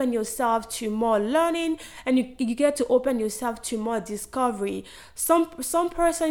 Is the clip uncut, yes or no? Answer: yes